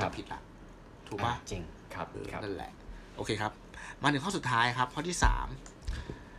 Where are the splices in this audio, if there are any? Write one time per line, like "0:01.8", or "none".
0:02.1